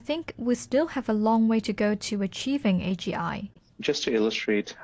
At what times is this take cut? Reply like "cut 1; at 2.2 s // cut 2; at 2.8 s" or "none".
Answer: cut 1; at 3.7 s